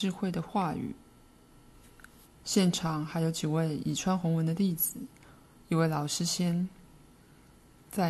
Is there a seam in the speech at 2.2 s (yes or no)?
yes